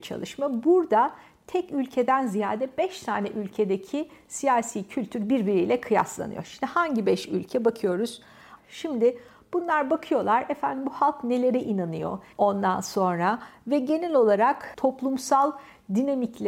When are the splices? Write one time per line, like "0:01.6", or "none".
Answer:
0:08.6
0:12.3